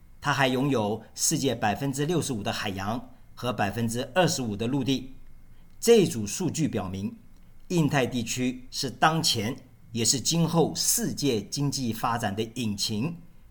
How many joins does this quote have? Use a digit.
0